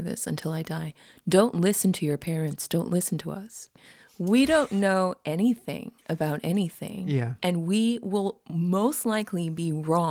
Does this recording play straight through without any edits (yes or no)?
yes